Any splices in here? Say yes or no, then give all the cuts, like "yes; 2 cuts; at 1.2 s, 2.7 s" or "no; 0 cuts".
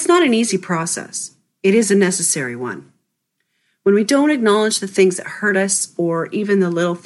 no; 0 cuts